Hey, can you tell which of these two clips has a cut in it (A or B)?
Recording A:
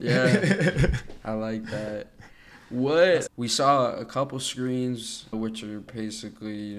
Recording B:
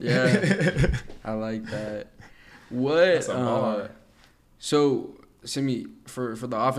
A